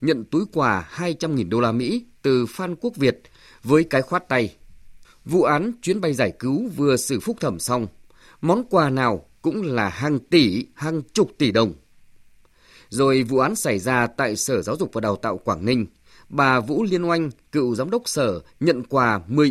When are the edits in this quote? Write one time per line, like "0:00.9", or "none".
0:05.0